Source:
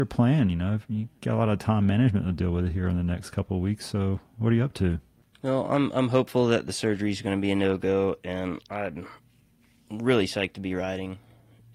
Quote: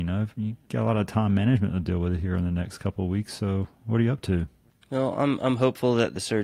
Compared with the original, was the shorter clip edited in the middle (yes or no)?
no